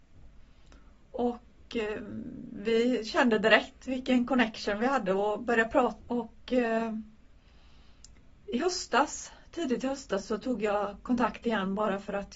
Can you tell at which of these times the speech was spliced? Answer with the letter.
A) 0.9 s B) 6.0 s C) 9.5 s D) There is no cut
B